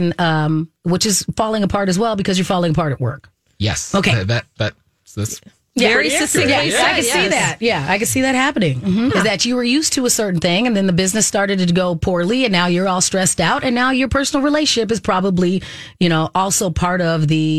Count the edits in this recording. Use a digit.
1